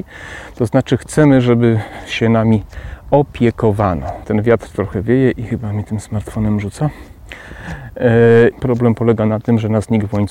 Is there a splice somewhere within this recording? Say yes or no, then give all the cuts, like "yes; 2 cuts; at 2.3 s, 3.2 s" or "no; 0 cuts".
yes; 2 cuts; at 4.2 s, 8.5 s